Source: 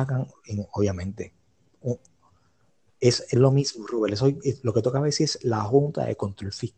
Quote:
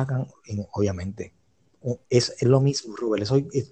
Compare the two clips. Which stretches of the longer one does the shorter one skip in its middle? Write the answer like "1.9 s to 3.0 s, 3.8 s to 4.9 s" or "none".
2.0 s to 2.9 s